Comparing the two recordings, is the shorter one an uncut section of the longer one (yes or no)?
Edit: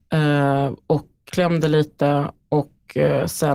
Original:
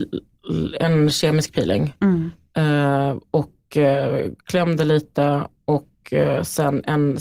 no